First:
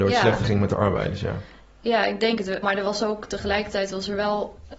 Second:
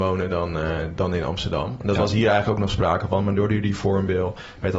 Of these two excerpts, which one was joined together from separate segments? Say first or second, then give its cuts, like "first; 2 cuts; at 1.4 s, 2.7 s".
first; 1 cut; at 2.6 s